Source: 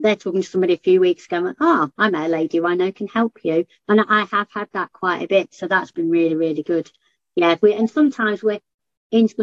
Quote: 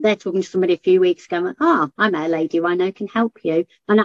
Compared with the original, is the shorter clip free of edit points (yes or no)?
yes